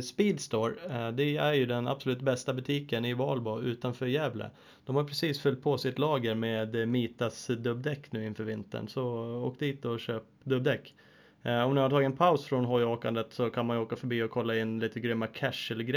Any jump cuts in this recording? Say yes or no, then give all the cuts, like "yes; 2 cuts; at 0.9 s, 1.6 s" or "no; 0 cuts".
yes; 1 cut; at 10.4 s